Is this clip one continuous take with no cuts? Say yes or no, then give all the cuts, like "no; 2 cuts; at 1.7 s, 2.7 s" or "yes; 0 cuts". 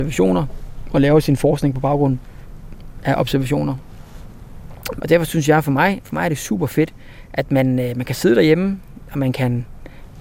no; 1 cut; at 5.0 s